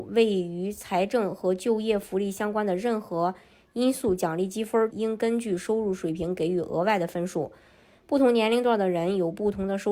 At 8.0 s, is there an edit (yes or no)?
no